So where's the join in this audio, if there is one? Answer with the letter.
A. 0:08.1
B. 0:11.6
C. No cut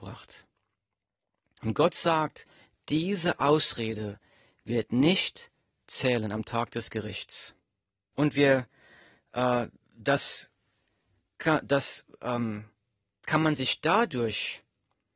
A